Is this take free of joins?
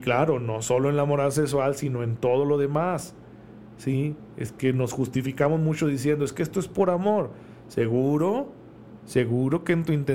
yes; 0 cuts

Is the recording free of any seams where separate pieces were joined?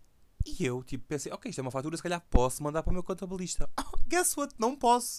yes; 0 cuts

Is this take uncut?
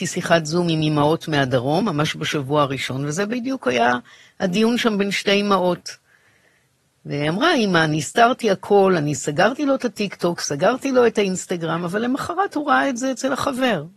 yes; 0 cuts

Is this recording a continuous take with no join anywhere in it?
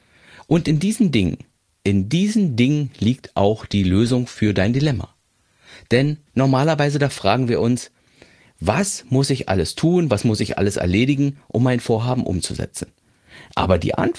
no; 1 cut; at 6.3 s

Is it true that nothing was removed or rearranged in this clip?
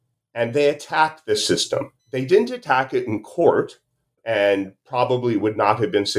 no; 2 cuts; at 2.0 s, 4.2 s

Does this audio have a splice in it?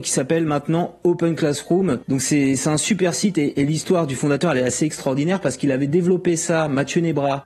no; 0 cuts

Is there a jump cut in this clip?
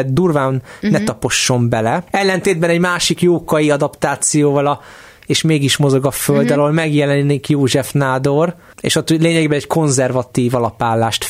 yes; 1 cut; at 2.1 s

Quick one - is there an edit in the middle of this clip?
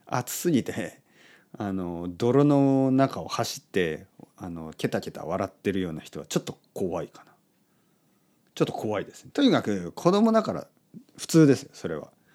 yes; 1 cut; at 9.3 s

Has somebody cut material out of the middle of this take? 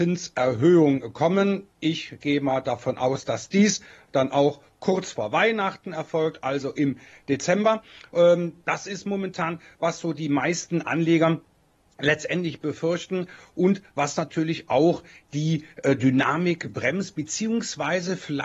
no; 0 cuts

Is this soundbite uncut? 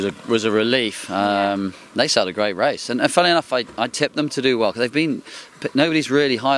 yes; 0 cuts

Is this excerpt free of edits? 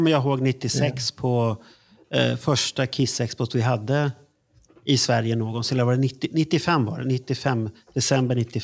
yes; 0 cuts

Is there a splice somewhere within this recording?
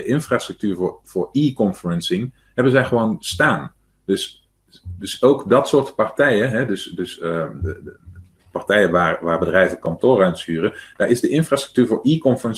no; 0 cuts

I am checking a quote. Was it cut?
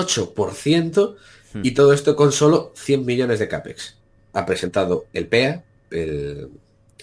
yes; 2 cuts; at 4.2 s, 5.9 s

